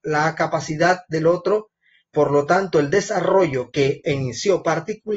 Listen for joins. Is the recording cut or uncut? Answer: uncut